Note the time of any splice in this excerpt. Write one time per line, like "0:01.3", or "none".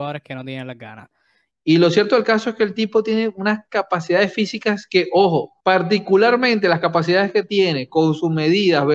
0:01.5
0:05.6